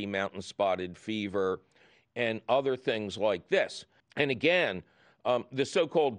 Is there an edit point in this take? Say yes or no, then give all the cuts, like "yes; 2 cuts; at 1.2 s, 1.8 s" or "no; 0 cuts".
yes; 1 cut; at 4.0 s